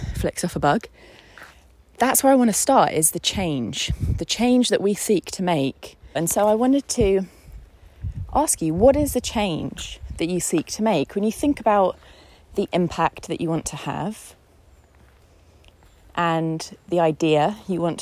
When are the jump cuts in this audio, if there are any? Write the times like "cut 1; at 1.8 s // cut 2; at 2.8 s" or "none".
cut 1; at 6.2 s